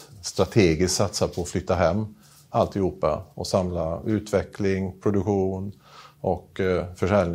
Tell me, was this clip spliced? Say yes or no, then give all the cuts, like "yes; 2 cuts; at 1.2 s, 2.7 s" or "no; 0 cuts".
no; 0 cuts